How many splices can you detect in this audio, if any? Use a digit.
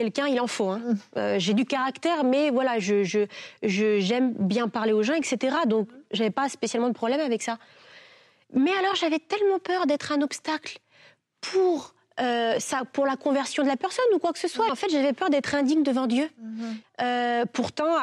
2